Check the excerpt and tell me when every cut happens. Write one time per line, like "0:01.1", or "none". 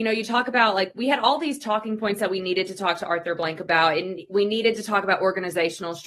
none

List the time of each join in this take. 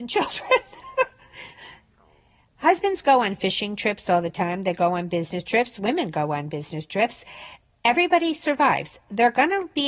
none

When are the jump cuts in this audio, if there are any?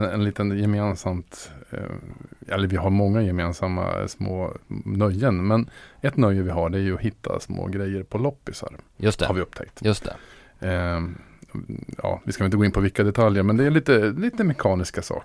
none

